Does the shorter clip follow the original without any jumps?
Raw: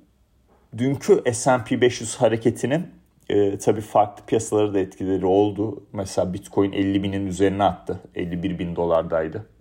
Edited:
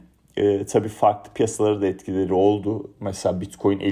yes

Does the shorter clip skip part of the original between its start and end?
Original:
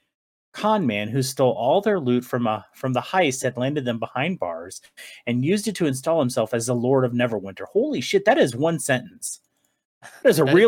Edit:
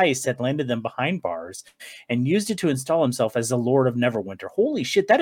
no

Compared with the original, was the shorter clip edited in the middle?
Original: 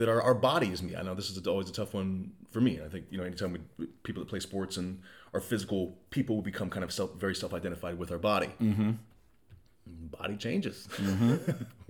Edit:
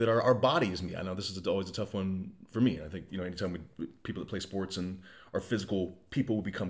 no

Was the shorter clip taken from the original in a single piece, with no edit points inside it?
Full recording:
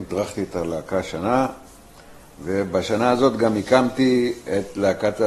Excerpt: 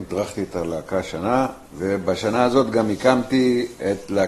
no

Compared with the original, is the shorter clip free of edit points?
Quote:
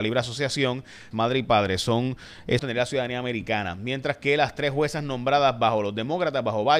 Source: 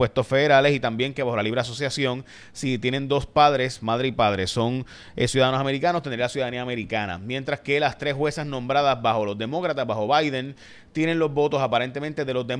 no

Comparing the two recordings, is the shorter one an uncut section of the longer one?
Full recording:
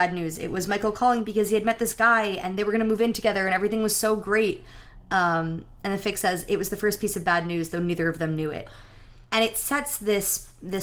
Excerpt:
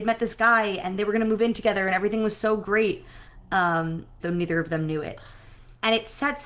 no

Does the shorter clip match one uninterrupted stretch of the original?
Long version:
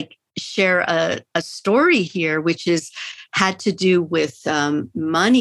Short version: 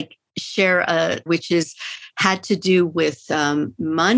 no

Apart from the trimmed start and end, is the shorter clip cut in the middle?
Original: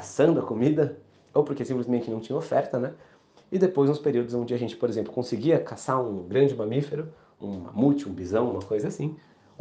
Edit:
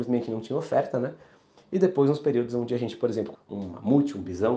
yes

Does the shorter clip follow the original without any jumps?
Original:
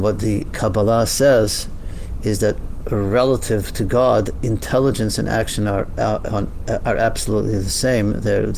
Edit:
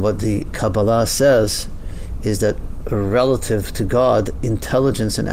yes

